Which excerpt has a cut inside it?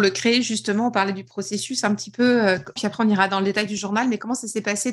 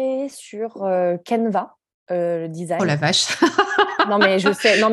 first; 1 cut; at 2.8 s

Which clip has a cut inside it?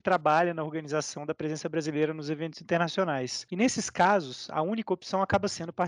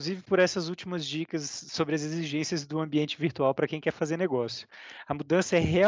first; 1 cut; at 3.5 s

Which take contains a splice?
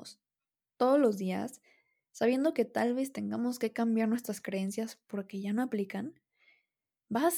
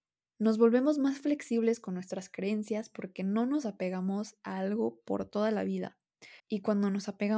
second; 1 cut; at 6.4 s

